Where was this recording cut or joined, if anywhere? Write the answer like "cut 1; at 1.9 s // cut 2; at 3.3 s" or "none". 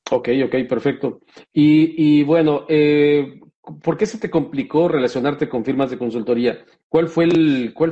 none